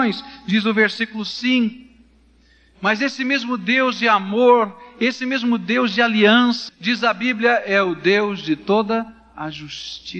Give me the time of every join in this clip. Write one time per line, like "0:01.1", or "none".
0:06.7